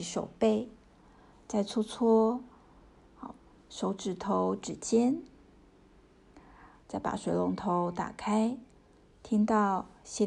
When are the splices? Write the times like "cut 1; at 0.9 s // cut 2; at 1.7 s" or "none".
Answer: cut 1; at 6.8 s